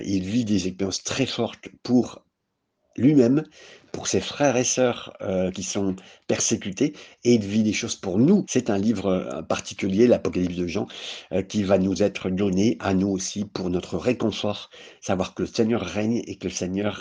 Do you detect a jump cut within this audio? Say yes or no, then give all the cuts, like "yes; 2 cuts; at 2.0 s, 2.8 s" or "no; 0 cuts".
yes; 2 cuts; at 5.5 s, 8.4 s